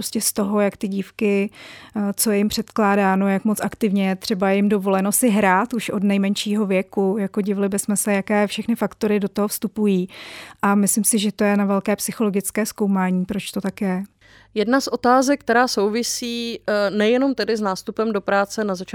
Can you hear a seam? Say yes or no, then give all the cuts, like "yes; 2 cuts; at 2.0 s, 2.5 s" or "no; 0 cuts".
no; 0 cuts